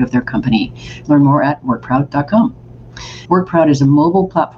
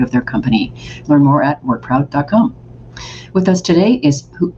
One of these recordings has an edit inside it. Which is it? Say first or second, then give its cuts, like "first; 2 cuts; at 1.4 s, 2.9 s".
first; 1 cut; at 3.3 s